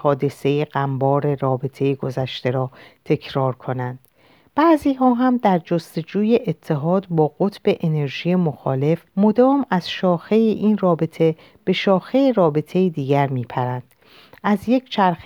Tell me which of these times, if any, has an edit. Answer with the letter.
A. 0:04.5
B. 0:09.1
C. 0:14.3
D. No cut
B